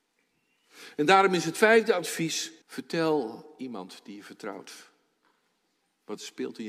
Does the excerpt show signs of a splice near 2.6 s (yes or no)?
yes